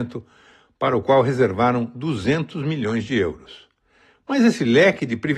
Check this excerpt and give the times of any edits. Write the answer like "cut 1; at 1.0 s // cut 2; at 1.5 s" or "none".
none

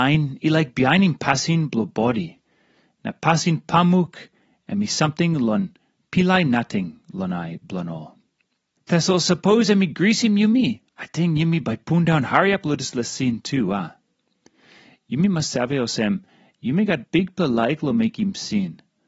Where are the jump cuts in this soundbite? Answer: cut 1; at 8.8 s // cut 2; at 10.9 s

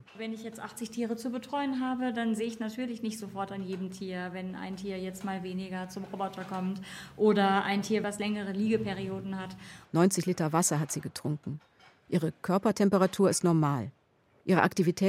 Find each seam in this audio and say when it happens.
cut 1; at 9.8 s

